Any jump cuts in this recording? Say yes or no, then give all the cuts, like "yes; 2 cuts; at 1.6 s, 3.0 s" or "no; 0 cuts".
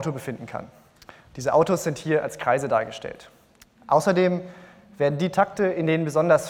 no; 0 cuts